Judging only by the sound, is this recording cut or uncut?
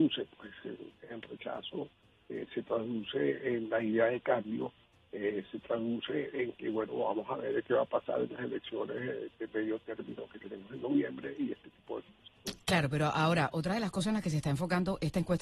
cut